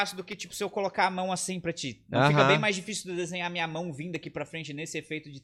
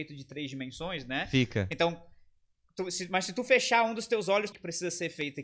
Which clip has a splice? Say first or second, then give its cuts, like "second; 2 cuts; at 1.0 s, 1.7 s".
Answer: second; 1 cut; at 4.5 s